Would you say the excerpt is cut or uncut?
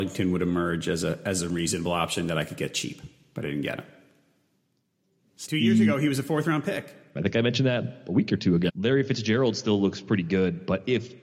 cut